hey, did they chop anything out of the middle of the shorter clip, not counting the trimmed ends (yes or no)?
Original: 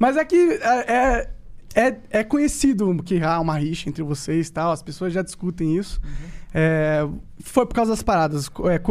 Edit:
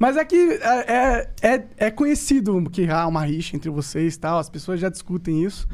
yes